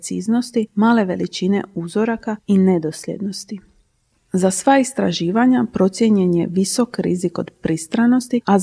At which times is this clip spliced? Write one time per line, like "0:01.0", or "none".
0:04.2